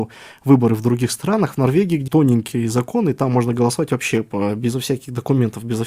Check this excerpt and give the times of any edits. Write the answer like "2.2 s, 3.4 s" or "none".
2.1 s